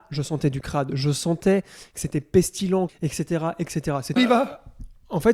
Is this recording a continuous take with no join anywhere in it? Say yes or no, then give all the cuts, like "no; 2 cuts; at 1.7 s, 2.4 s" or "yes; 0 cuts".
no; 2 cuts; at 2.9 s, 4.2 s